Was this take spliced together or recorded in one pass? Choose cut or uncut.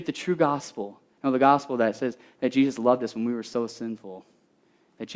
cut